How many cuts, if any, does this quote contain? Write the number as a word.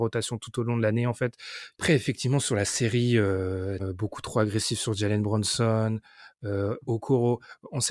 two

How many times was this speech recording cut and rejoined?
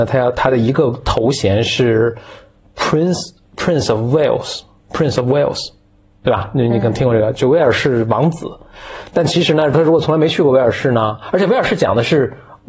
zero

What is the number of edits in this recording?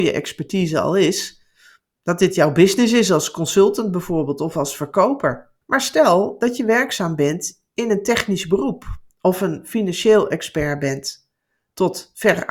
two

